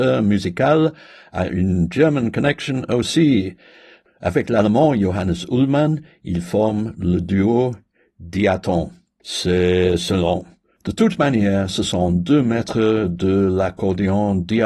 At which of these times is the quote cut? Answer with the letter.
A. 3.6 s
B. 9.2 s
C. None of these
B